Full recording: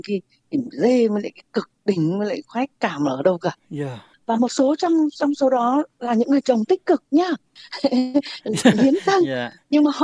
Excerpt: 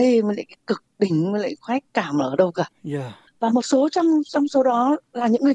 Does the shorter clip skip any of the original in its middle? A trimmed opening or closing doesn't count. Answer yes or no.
no